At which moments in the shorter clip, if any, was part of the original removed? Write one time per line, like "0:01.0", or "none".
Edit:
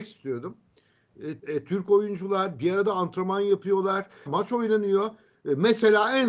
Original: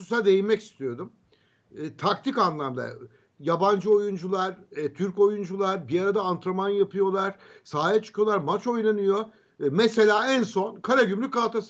0:01.4
0:04.3